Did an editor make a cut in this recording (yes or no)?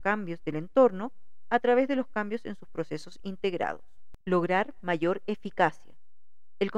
yes